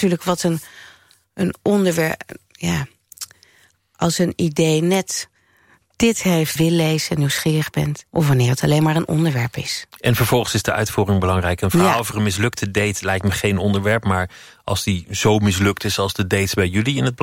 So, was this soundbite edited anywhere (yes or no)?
yes